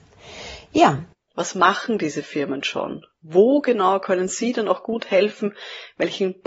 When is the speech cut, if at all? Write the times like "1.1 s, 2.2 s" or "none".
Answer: 1.3 s